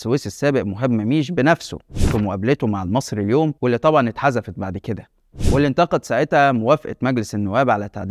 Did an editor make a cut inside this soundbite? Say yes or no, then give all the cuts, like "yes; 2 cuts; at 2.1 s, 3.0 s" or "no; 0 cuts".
yes; 1 cut; at 3.6 s